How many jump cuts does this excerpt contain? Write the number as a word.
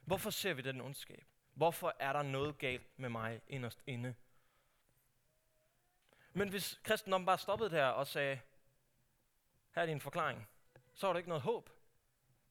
one